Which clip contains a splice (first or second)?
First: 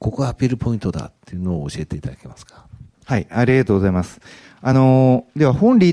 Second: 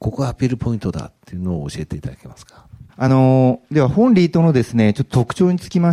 second